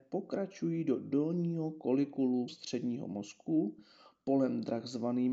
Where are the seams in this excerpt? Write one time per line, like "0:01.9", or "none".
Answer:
0:02.5